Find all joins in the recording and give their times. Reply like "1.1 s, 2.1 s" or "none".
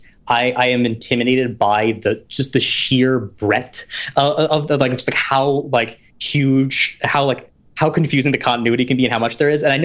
none